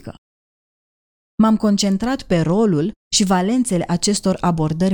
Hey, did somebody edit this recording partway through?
no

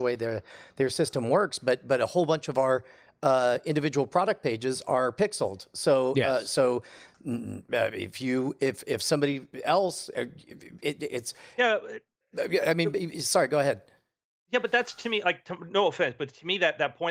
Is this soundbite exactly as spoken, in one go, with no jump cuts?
yes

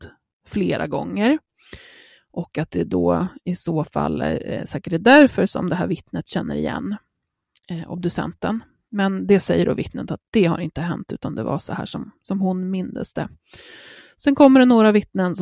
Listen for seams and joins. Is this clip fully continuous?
yes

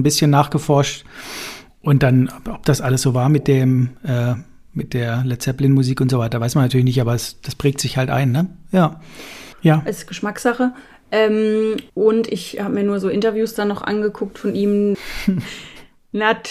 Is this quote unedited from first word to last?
no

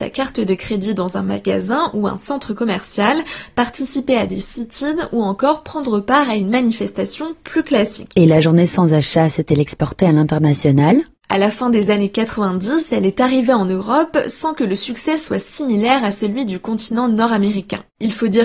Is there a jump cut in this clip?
no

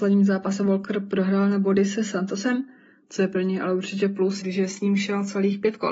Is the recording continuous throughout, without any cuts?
no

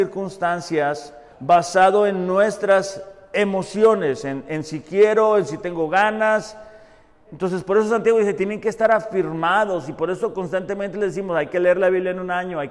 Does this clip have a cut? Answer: yes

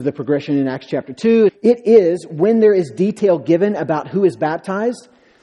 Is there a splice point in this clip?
yes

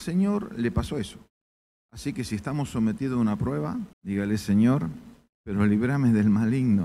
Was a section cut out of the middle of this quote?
yes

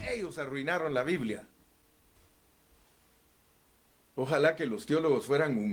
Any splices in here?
no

